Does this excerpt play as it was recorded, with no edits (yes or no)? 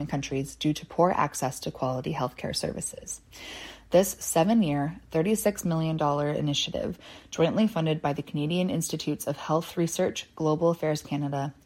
yes